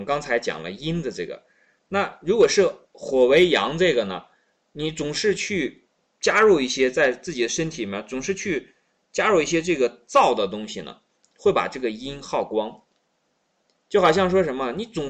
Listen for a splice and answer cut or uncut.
uncut